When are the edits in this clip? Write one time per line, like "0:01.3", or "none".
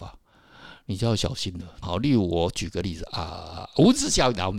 0:01.8